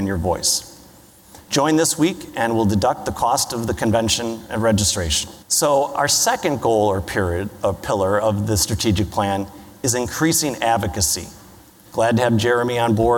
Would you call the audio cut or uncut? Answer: cut